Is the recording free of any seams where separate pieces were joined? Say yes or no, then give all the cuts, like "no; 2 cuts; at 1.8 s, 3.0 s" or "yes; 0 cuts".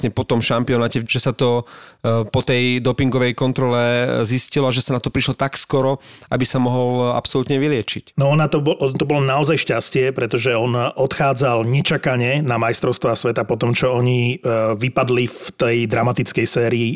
no; 1 cut; at 1.0 s